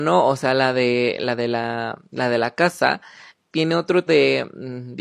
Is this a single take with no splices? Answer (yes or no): no